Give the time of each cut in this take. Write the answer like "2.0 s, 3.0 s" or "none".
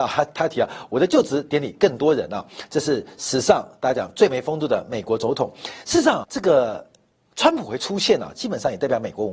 6.2 s